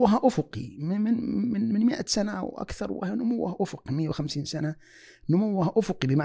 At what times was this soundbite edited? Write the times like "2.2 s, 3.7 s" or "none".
none